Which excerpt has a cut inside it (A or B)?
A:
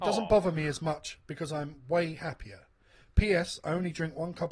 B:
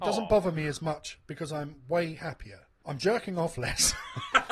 B